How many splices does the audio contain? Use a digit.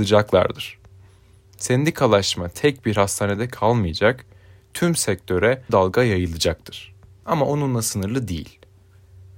2